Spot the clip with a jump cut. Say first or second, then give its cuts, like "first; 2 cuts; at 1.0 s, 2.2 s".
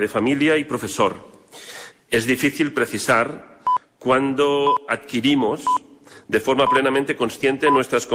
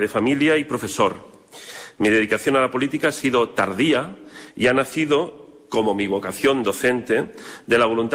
first; 1 cut; at 1.9 s